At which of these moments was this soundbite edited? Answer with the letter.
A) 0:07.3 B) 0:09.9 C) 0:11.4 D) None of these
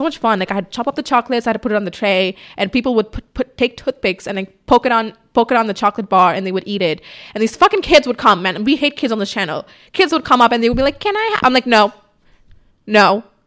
D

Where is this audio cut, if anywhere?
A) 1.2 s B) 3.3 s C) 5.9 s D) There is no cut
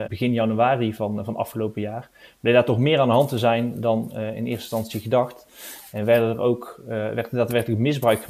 D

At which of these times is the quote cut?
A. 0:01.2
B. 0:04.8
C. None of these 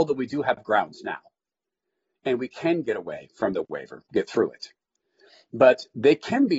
C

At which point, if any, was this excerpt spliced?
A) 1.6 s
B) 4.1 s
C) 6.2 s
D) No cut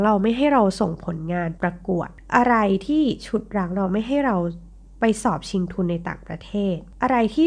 A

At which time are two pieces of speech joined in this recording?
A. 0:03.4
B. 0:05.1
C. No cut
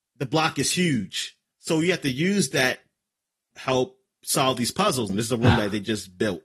B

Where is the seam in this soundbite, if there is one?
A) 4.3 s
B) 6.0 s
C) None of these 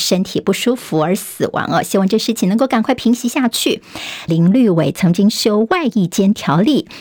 A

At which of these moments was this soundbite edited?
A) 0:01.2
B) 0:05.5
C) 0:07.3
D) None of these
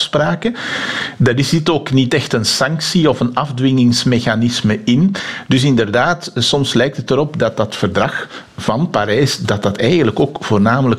D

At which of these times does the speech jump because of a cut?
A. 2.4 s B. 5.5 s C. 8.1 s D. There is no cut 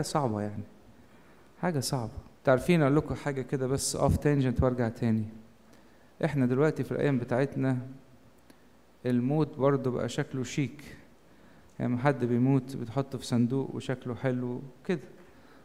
A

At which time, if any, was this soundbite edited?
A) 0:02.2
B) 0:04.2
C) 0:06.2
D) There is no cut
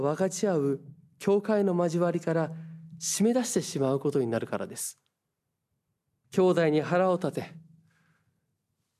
C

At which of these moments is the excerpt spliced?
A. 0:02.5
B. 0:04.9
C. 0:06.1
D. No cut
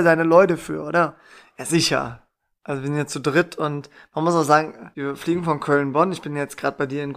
B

